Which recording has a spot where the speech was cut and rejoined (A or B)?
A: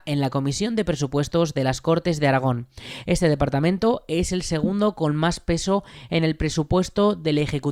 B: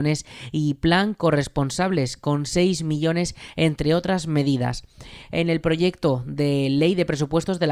A